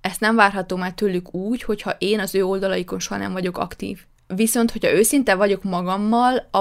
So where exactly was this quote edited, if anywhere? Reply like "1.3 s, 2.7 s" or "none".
4.1 s